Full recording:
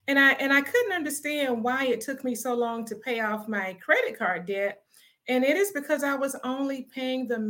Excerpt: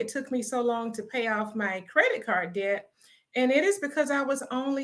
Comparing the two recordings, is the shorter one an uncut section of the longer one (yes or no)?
yes